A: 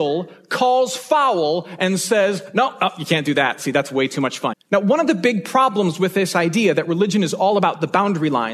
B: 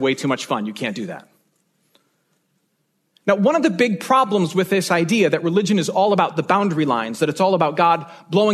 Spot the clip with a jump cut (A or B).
A